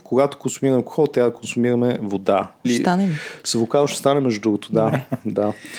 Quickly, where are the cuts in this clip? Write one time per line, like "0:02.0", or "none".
0:02.6